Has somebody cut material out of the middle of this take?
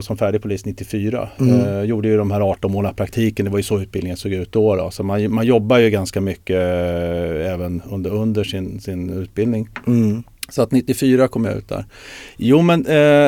no; 0 cuts

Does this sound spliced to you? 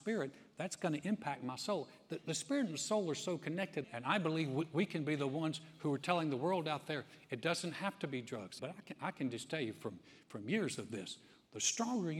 yes; 2 cuts; at 3.8 s, 8.6 s

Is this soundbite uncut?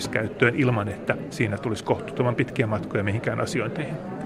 no; 1 cut; at 1.3 s

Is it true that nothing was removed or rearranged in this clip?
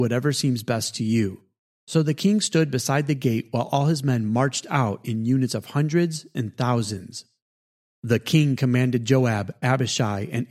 yes; 0 cuts

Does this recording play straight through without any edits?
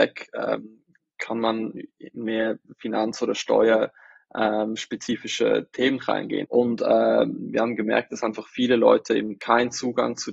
no; 1 cut; at 6.4 s

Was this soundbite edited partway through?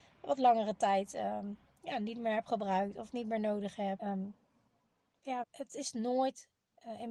yes; 2 cuts; at 4.0 s, 5.4 s

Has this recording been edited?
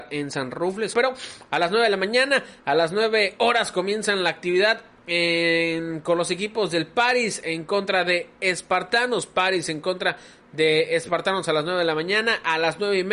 yes; 1 cut; at 0.9 s

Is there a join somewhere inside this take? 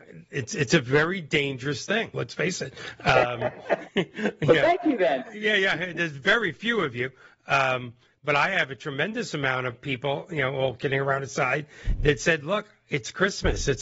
yes; 1 cut; at 2.1 s

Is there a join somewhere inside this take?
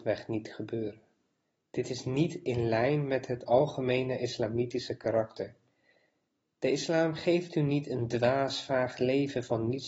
no; 0 cuts

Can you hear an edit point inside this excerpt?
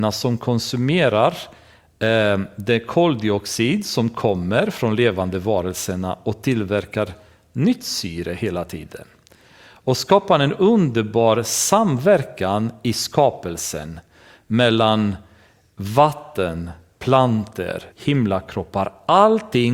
yes; 1 cut; at 17.9 s

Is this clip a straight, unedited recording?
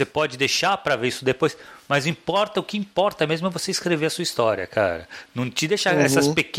yes; 0 cuts

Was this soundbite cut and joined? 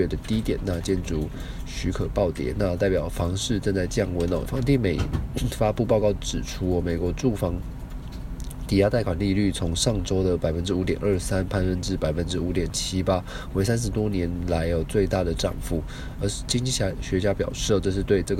yes; 1 cut; at 4.5 s

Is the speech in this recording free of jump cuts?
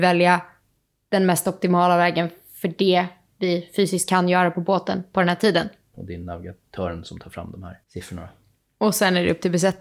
no; 2 cuts; at 5.9 s, 7.8 s

